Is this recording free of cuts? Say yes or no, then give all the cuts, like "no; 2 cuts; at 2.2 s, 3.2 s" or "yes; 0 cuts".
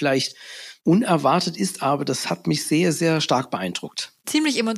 yes; 0 cuts